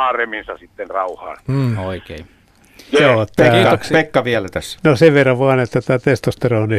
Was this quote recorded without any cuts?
yes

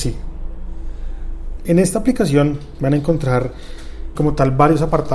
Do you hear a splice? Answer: yes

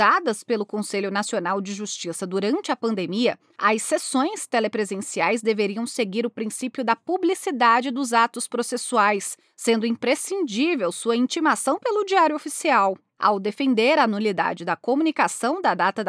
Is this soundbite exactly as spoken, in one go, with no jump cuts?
yes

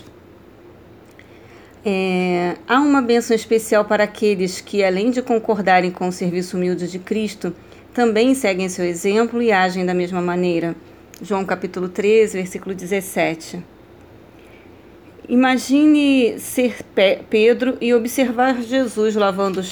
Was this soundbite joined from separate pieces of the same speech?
no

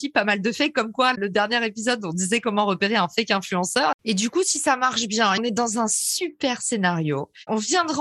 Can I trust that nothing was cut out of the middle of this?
no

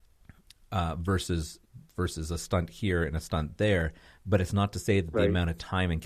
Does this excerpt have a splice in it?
no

